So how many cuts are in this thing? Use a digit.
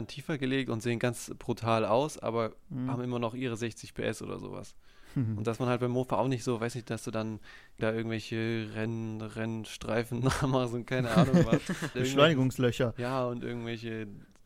2